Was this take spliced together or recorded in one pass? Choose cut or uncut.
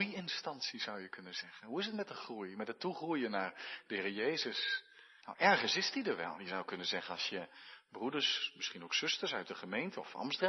cut